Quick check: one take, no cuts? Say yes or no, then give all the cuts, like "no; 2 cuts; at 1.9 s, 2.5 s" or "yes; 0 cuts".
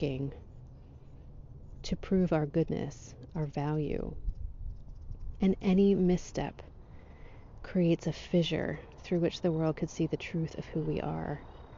no; 1 cut; at 3.3 s